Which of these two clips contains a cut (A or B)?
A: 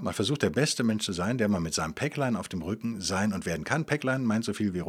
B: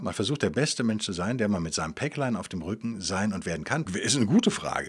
B